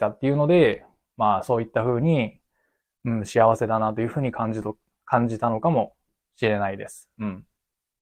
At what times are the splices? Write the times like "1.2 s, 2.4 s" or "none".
none